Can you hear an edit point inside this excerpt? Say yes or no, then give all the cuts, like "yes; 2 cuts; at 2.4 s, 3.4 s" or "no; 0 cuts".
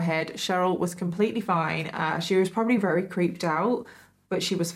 no; 0 cuts